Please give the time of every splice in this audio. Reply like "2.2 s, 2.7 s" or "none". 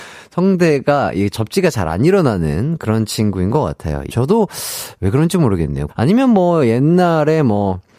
4.1 s, 5.9 s